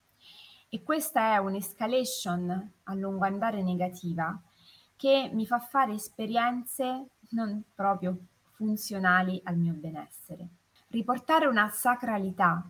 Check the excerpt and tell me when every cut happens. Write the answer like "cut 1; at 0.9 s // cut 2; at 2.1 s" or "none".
cut 1; at 10.8 s